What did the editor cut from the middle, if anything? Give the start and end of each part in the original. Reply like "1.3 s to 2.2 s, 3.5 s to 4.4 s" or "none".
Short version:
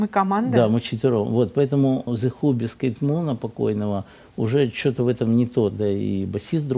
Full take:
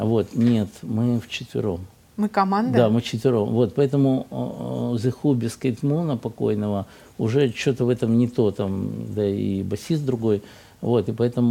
4.3 s to 4.9 s, 8.5 s to 9.1 s